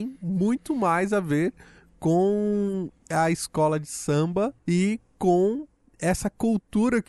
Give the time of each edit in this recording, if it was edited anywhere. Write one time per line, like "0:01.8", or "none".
0:04.6